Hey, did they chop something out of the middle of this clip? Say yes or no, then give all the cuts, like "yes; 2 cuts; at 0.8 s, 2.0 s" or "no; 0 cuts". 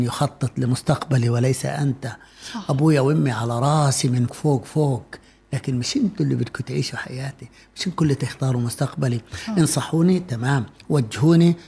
yes; 1 cut; at 4.3 s